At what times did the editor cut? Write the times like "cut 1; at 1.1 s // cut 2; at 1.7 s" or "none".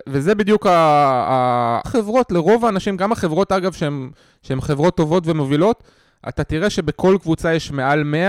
cut 1; at 1.8 s

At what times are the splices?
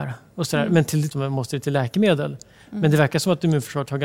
cut 1; at 1.1 s

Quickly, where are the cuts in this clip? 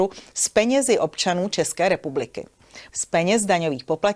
cut 1; at 2.9 s

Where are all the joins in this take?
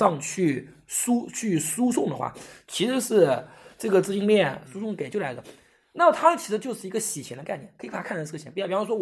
cut 1; at 4.6 s

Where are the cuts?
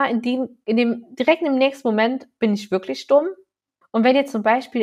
cut 1; at 3.8 s

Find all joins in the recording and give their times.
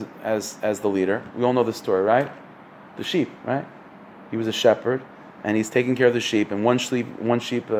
none

